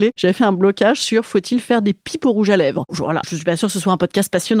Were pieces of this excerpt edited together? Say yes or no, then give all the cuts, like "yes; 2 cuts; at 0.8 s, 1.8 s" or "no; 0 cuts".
yes; 1 cut; at 3.2 s